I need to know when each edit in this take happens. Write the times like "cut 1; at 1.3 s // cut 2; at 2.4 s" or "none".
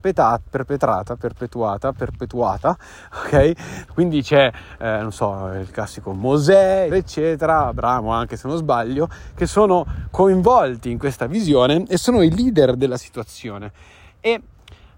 cut 1; at 3.9 s // cut 2; at 6.9 s